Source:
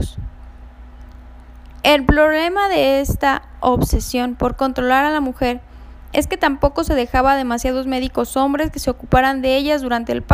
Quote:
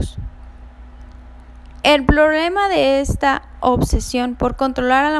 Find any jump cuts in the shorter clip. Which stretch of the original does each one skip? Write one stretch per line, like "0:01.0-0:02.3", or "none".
none